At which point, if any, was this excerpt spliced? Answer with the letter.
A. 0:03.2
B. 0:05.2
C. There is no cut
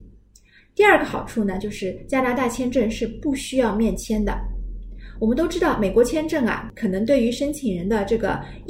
C